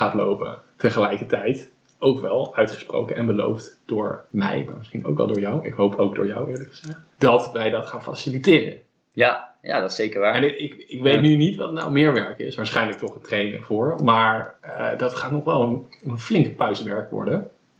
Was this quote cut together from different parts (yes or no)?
no